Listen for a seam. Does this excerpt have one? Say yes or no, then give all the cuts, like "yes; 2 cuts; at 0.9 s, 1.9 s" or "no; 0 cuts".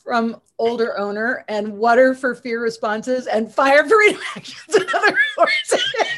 no; 0 cuts